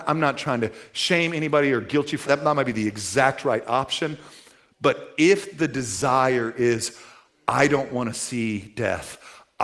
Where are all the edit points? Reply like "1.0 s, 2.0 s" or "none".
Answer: 2.3 s